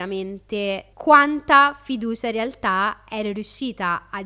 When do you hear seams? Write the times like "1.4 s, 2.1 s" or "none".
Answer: 0.9 s